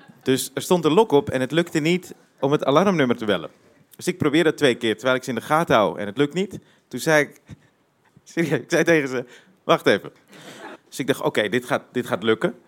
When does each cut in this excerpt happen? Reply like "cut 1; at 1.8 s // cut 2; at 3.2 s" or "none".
cut 1; at 10.8 s